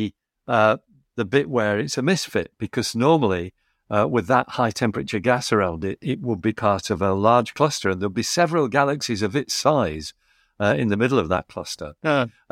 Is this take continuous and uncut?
yes; 0 cuts

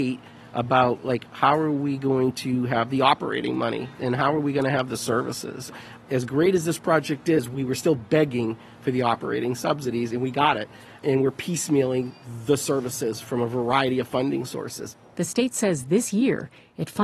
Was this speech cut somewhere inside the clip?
no; 0 cuts

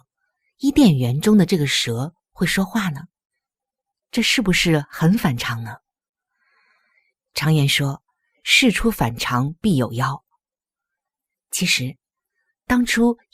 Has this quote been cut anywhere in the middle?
no; 0 cuts

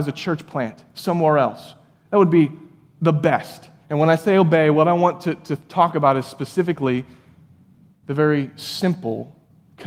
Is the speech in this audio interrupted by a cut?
yes; 1 cut; at 3.8 s

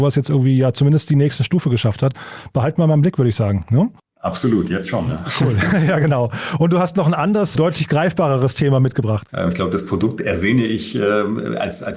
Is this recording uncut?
no; 2 cuts; at 7.6 s, 9.3 s

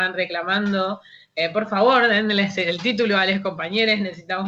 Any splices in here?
no; 0 cuts

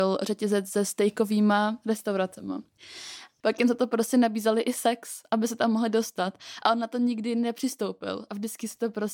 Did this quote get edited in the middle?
yes; 1 cut; at 3.4 s

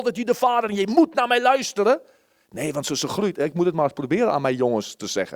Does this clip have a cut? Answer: no; 0 cuts

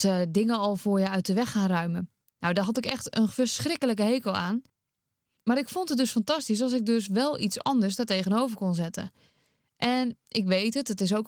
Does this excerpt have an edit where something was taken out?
no; 0 cuts

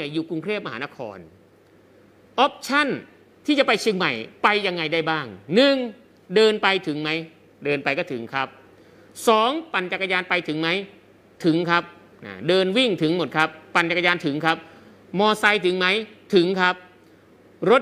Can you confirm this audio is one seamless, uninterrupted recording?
yes; 0 cuts

